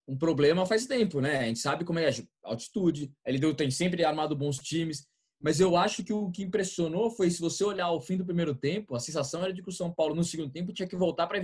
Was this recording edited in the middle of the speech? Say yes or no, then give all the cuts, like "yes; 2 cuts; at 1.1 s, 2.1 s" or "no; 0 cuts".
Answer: no; 0 cuts